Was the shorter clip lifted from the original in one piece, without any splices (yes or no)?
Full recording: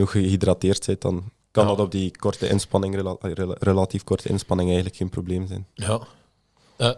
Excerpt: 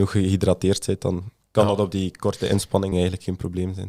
no